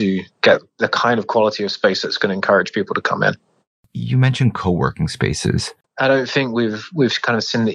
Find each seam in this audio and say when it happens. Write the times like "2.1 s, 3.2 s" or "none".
5.8 s